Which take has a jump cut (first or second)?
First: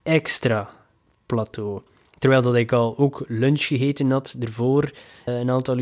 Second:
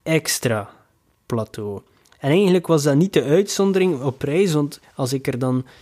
first